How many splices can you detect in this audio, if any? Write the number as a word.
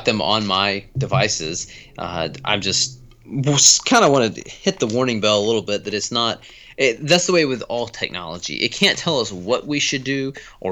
zero